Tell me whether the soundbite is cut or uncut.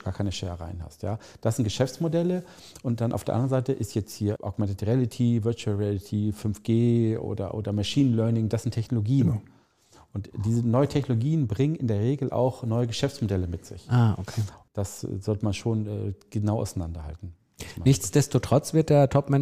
uncut